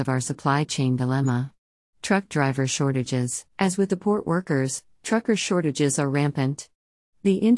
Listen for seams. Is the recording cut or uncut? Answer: cut